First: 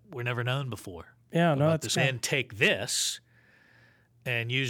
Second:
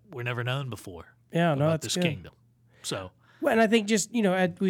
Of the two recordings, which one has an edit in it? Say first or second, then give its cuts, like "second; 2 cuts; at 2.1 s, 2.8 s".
first; 1 cut; at 2.0 s